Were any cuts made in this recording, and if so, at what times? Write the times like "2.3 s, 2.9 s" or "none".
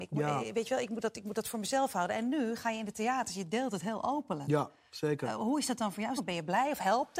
6.2 s